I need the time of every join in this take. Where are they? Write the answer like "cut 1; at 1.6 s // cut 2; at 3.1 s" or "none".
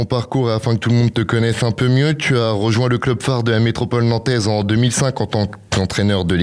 none